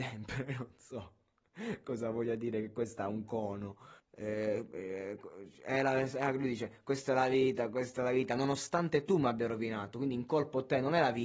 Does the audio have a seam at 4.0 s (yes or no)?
yes